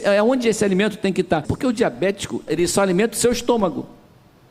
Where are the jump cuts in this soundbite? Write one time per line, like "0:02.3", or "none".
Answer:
0:01.4
0:02.5